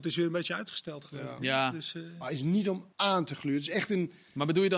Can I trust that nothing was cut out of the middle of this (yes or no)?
no